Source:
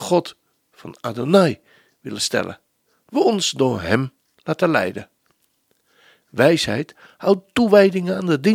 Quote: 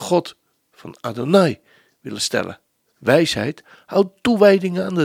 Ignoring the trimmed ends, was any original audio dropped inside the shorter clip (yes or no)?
yes